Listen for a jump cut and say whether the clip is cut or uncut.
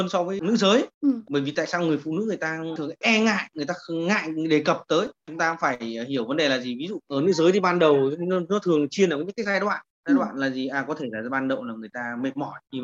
uncut